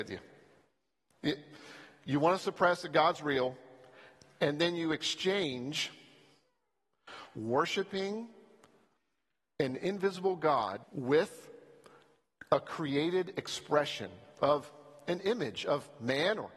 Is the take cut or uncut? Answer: cut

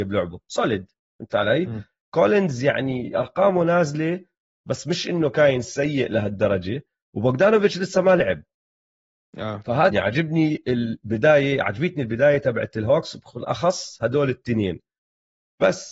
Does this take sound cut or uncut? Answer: cut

